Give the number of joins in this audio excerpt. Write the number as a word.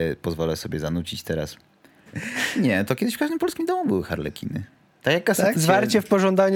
two